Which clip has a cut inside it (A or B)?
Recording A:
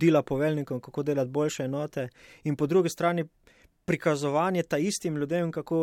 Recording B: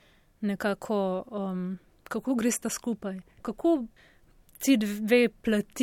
B